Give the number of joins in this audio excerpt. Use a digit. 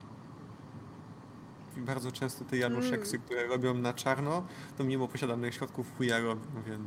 1